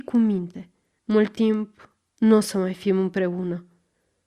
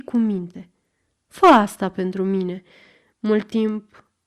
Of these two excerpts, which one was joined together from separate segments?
first; 1 cut; at 1.0 s

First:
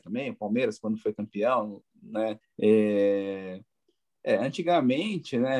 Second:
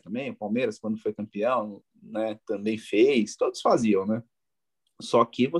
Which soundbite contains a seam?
first; 1 cut; at 2.4 s

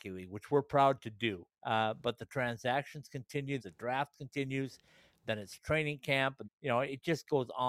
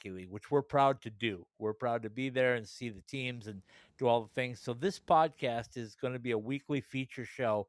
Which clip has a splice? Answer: first; 3 cuts; at 1.5 s, 3.6 s, 6.4 s

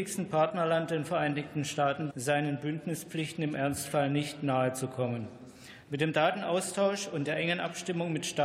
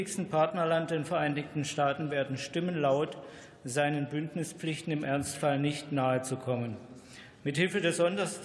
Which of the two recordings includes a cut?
first; 2 cuts; at 2.1 s, 5.8 s

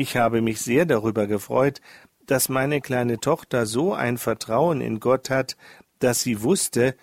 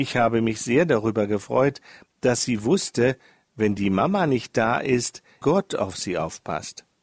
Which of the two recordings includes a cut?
second; 2 cuts; at 2.0 s, 5.4 s

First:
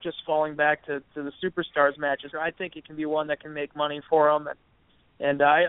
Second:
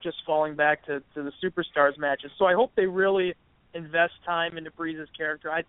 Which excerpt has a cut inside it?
first; 1 cut; at 2.3 s

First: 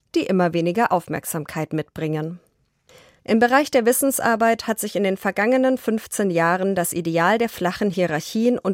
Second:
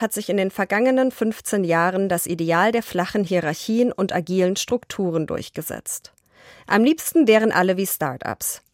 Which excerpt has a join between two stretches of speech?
first; 1 cut; at 3.2 s

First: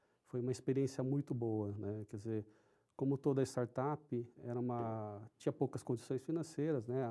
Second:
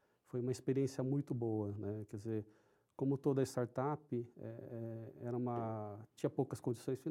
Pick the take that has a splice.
first; 1 cut; at 4.4 s

